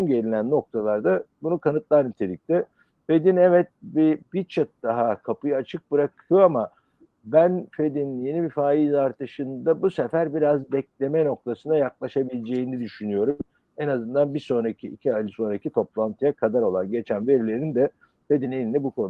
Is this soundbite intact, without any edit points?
no; 1 cut; at 4.2 s

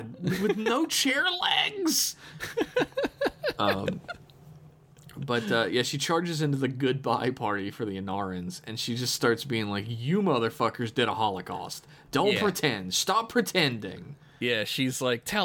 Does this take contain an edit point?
no; 0 cuts

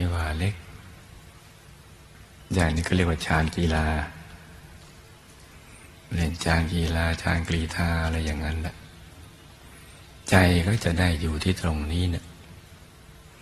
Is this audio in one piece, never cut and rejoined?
yes; 0 cuts

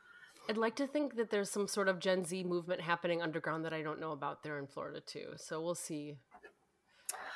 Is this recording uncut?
yes; 0 cuts

